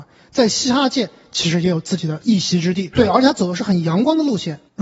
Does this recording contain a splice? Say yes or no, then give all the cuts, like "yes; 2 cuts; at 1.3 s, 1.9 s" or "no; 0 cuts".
yes; 1 cut; at 2.9 s